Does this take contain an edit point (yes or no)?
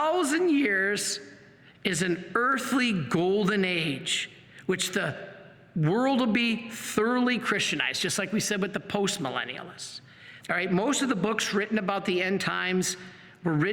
yes